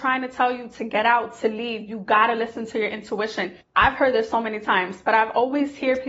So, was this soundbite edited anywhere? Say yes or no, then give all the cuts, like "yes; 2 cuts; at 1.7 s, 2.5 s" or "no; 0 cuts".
no; 0 cuts